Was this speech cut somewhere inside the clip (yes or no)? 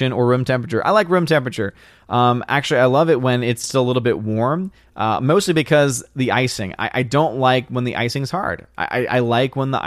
yes